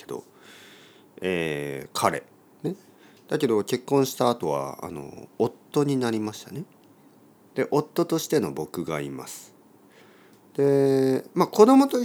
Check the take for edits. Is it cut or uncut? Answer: uncut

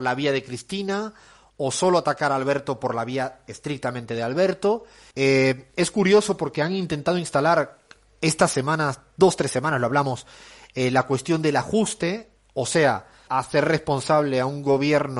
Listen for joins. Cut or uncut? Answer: cut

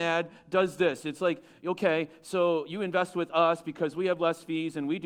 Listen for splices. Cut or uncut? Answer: uncut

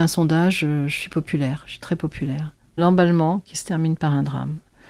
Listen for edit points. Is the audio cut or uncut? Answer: cut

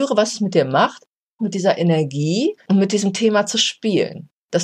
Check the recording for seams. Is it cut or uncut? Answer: cut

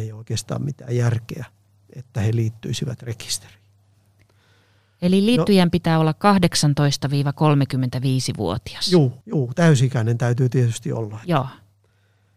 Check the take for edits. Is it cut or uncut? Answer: cut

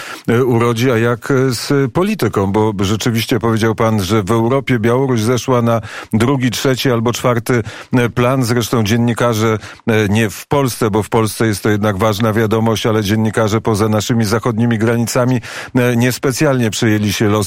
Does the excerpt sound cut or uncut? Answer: uncut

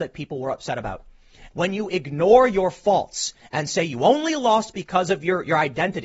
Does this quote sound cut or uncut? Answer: cut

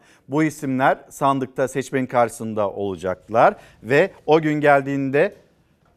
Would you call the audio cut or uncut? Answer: uncut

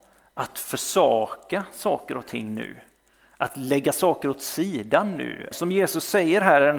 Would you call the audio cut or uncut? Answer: cut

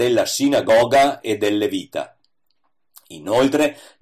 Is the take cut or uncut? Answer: uncut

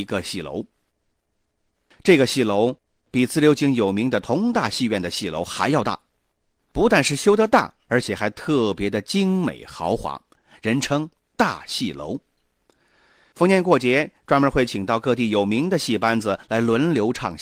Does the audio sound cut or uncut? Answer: uncut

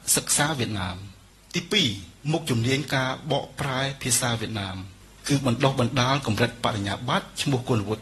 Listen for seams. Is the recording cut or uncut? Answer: uncut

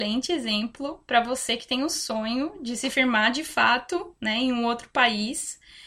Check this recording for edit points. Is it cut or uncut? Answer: uncut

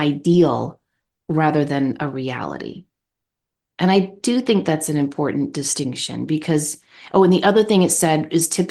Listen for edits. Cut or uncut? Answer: uncut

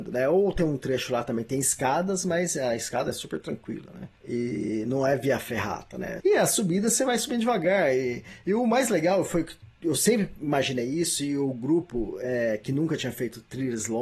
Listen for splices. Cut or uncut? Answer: cut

